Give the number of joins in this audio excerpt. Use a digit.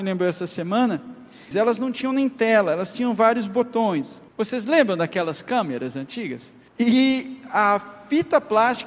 3